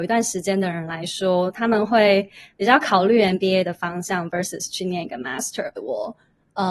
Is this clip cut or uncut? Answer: cut